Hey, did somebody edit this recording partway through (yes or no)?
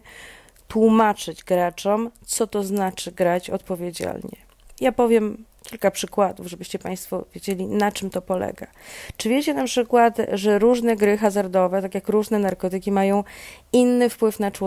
no